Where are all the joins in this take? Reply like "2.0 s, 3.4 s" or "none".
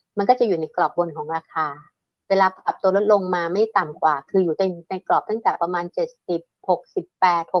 none

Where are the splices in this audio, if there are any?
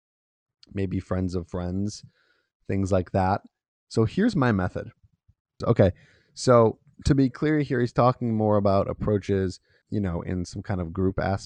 5.6 s, 9.8 s

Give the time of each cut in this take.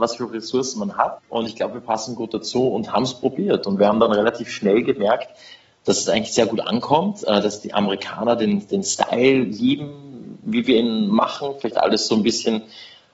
1.2 s

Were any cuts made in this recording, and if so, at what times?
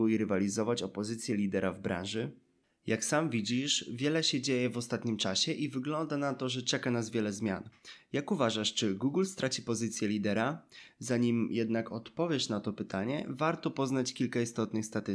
none

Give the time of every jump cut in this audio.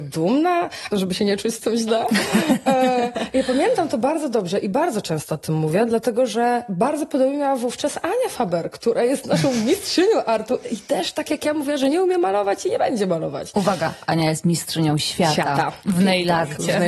0.9 s

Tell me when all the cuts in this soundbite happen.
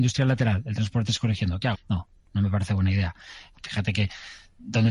1.7 s, 3.5 s

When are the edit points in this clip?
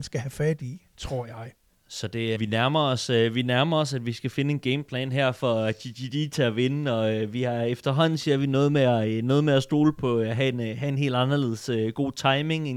2.3 s

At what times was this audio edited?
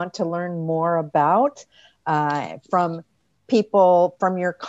none

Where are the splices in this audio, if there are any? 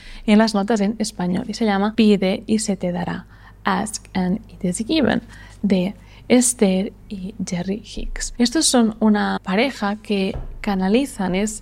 none

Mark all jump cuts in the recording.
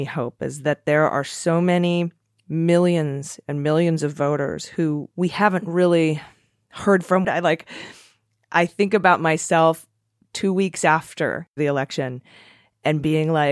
7.2 s

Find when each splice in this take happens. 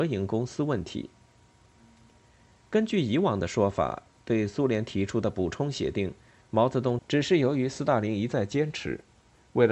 7.0 s

